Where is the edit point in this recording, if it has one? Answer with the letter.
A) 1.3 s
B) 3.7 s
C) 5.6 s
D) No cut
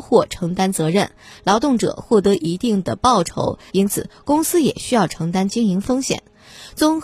B